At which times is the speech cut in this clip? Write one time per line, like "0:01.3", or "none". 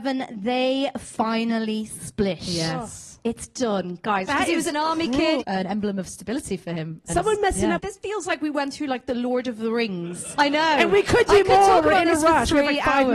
0:04.3
0:05.4
0:07.8